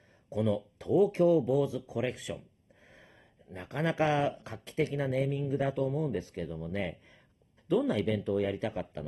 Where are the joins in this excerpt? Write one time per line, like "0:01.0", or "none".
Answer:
0:07.6